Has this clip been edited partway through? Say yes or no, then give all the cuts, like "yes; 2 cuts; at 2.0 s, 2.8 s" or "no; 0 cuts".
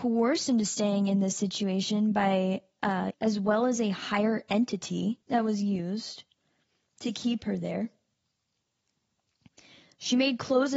yes; 2 cuts; at 3.1 s, 5.2 s